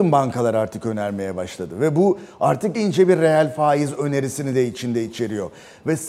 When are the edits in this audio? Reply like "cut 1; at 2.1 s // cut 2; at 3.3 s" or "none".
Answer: cut 1; at 2.7 s